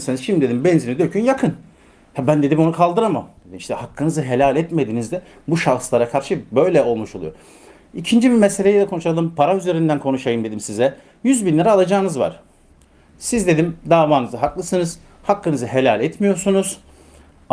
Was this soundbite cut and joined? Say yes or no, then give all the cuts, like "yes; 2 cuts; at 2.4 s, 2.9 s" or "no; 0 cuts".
no; 0 cuts